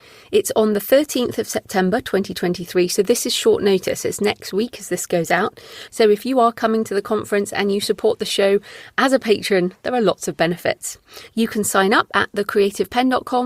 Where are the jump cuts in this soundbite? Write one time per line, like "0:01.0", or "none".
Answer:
0:05.9
0:11.3